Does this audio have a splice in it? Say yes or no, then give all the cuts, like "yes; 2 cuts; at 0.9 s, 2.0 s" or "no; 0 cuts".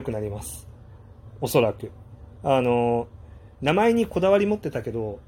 no; 0 cuts